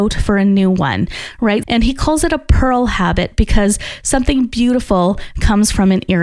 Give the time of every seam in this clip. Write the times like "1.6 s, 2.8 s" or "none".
1.6 s